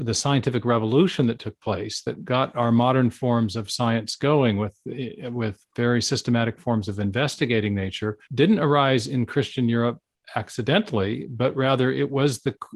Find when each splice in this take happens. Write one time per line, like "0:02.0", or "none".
0:08.2